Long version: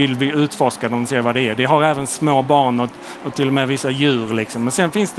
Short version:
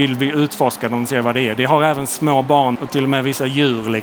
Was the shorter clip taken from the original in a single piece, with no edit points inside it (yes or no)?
no